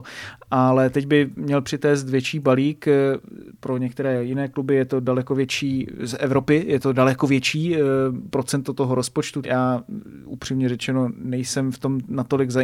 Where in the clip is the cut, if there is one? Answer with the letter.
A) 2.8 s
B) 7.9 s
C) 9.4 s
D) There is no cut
C